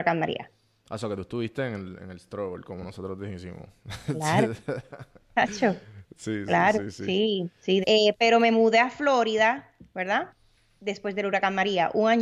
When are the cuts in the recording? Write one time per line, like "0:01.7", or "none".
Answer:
0:07.8